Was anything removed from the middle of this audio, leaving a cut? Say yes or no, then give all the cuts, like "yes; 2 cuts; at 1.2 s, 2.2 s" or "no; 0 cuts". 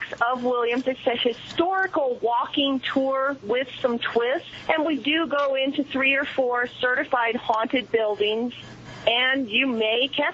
no; 0 cuts